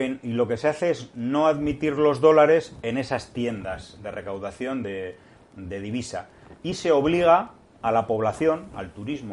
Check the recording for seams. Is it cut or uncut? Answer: uncut